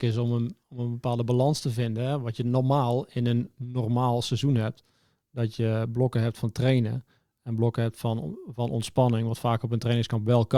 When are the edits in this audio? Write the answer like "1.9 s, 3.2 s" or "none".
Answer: none